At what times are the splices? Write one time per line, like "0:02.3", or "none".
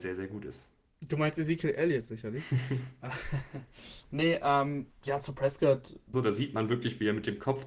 0:06.1